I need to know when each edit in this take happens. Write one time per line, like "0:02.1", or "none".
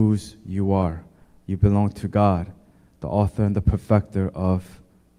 none